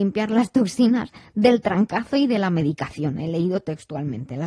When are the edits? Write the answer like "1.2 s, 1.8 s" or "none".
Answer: none

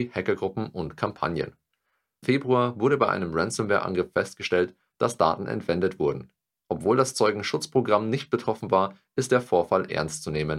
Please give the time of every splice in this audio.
2.2 s

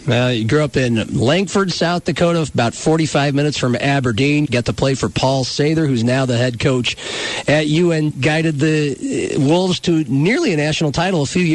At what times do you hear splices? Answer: 4.5 s, 8.1 s

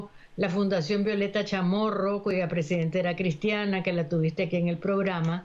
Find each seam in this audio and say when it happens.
none

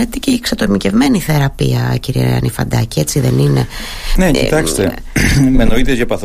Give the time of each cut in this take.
none

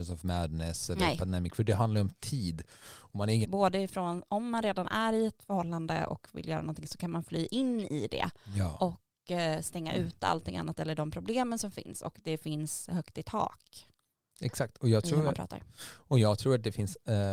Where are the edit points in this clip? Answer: 3.4 s

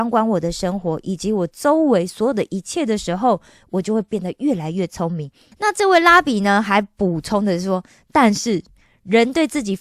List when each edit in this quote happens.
5.5 s

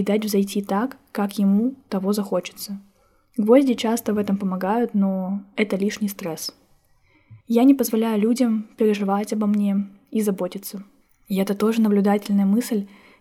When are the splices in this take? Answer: 7.4 s

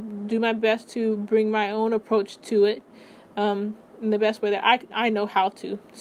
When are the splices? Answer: none

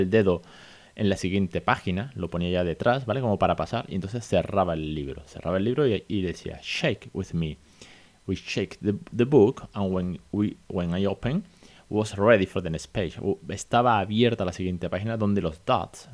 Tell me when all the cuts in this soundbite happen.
none

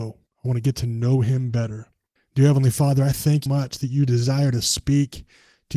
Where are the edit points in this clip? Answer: 2.2 s, 3.5 s

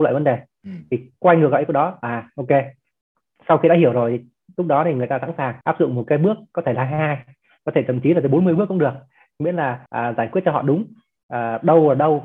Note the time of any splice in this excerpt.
5.6 s, 9.9 s

